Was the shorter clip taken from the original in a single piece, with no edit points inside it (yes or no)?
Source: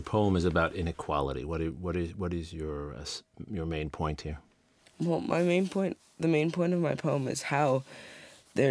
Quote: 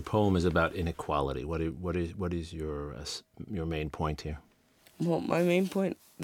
yes